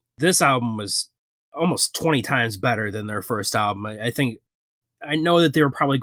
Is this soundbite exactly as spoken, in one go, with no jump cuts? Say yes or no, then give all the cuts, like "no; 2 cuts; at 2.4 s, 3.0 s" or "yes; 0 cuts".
yes; 0 cuts